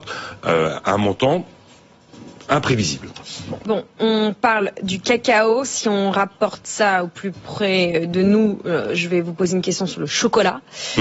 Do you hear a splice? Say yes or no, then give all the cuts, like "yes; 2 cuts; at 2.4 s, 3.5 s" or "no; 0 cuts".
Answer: no; 0 cuts